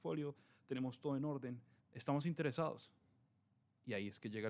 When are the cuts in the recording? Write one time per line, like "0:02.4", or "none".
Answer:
0:01.8